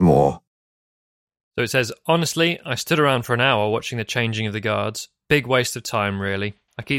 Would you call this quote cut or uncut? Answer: uncut